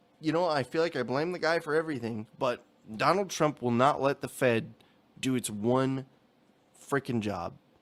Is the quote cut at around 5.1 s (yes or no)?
no